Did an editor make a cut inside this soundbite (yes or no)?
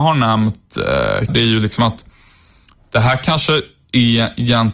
yes